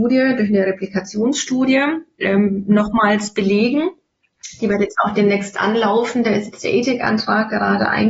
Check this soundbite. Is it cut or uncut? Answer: uncut